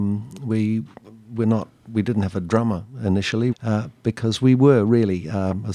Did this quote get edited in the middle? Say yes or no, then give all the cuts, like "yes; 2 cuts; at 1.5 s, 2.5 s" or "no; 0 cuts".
yes; 1 cut; at 3.5 s